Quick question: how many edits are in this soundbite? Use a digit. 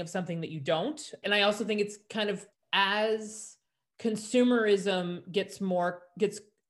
2